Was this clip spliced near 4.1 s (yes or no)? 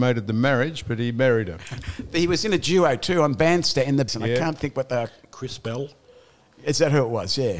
yes